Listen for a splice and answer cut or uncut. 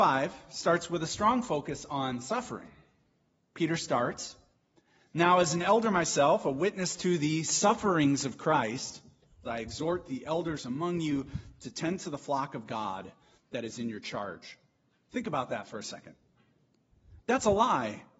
cut